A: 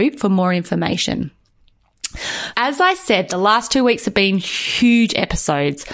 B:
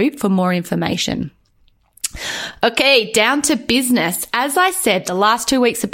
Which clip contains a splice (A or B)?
A